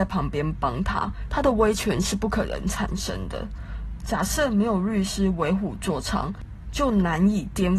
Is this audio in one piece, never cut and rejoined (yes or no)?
yes